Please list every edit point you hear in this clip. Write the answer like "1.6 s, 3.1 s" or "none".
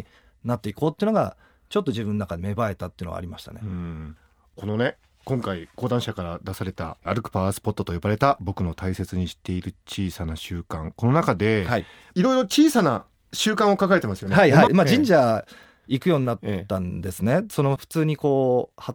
14.7 s